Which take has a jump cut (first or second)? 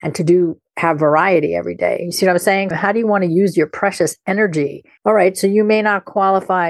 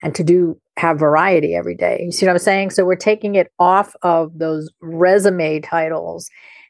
first